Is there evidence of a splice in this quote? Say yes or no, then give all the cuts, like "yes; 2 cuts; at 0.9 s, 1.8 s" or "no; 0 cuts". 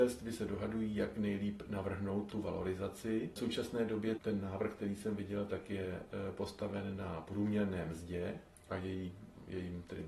yes; 1 cut; at 4.2 s